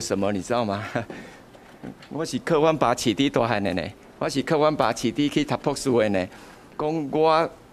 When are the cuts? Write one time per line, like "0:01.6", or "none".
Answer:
0:06.7